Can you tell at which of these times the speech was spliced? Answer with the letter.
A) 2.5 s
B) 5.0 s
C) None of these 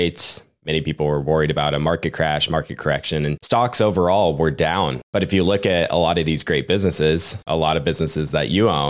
C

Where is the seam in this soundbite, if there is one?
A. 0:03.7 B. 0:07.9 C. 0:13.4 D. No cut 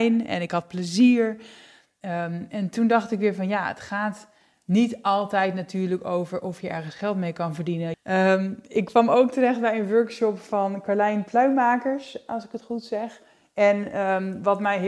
B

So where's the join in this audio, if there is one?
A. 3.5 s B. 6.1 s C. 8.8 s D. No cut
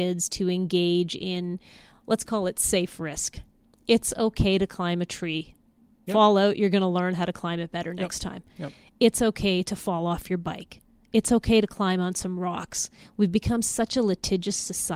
B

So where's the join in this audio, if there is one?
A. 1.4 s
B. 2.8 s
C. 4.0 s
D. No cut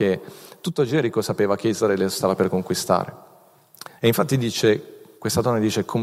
C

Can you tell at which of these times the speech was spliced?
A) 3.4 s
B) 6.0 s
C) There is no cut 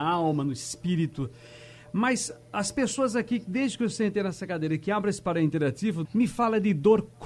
B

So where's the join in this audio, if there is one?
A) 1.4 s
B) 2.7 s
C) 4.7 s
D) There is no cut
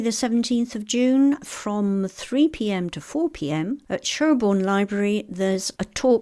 D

